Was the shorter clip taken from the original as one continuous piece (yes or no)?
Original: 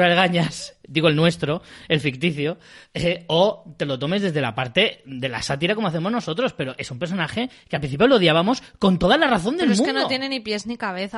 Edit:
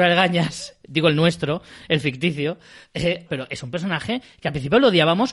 no